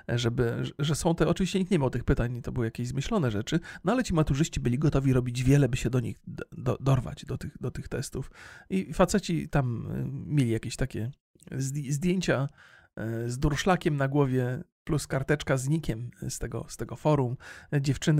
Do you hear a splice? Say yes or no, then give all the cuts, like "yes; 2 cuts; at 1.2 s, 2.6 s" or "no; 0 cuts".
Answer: no; 0 cuts